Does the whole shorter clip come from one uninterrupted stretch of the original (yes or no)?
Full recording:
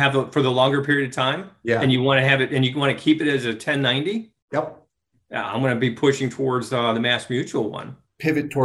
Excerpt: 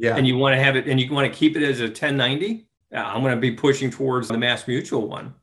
no